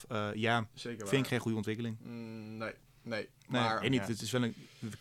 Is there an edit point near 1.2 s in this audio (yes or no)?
no